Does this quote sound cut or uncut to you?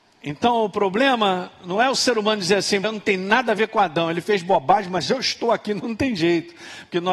cut